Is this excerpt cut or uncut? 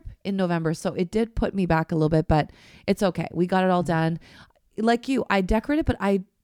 cut